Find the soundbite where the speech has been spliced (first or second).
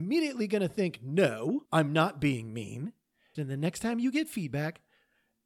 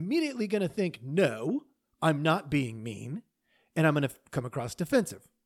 first